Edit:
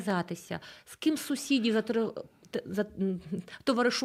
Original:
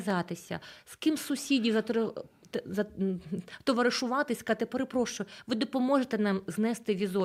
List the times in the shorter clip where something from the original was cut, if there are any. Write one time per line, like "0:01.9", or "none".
none